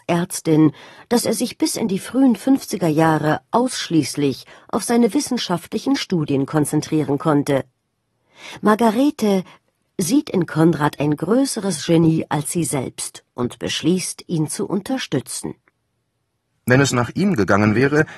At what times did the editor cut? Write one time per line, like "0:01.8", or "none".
0:09.9
0:16.5